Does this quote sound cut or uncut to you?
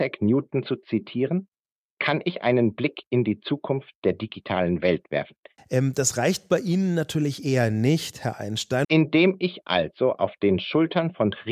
cut